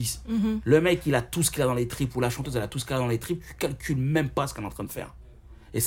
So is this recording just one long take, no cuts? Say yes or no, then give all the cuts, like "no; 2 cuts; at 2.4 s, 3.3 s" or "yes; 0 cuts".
yes; 0 cuts